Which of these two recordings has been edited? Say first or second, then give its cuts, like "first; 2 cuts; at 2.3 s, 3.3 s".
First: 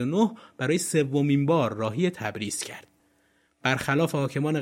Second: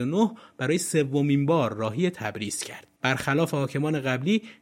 second; 1 cut; at 3.0 s